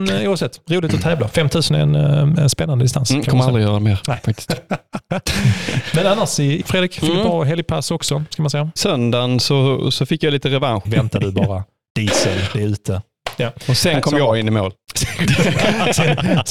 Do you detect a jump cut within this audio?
yes; 3 cuts; at 6.6 s, 8.8 s, 10.8 s

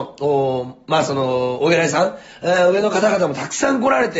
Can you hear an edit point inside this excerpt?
no; 0 cuts

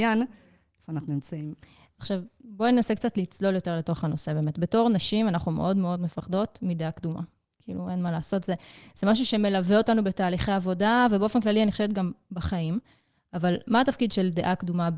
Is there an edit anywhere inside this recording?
no; 0 cuts

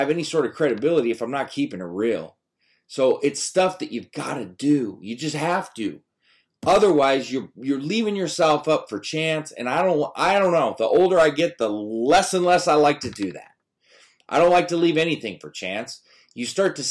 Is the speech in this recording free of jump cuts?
yes; 0 cuts

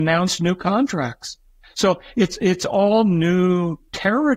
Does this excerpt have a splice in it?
yes; 1 cut; at 1.6 s

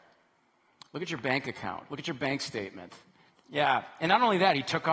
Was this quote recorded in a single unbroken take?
no; 1 cut; at 3.4 s

